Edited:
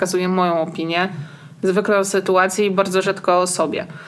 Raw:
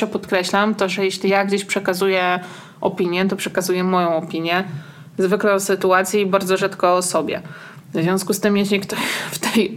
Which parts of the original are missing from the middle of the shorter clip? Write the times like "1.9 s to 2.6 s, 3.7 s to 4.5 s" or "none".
none